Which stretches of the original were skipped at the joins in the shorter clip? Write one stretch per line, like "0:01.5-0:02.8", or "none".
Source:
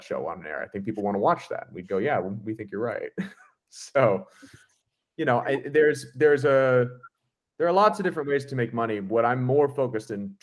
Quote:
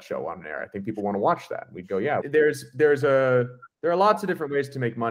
0:02.2-0:05.6
0:07.1-0:07.5